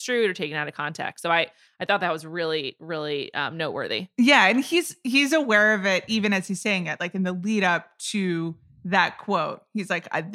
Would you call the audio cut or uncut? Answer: uncut